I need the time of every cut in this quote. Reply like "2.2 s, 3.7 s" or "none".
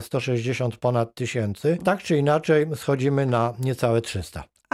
1.8 s